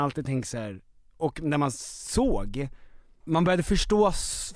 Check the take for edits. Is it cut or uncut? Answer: cut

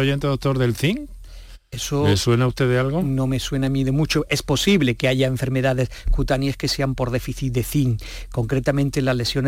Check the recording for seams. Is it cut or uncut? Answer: uncut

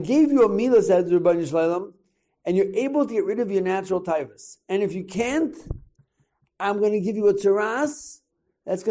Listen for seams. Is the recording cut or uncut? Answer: uncut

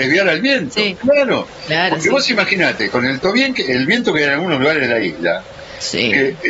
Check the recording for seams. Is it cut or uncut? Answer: uncut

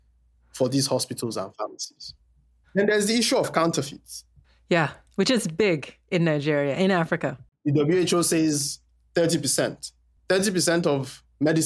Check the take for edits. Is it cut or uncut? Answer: uncut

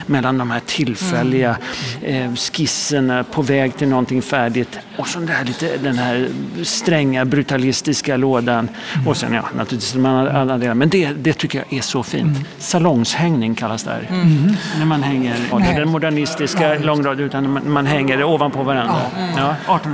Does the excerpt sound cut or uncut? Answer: cut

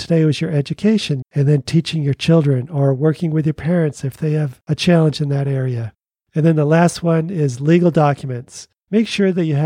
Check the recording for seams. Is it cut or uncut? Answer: cut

